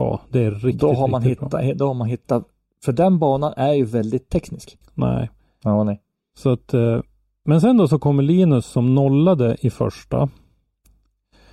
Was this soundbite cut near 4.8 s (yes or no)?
yes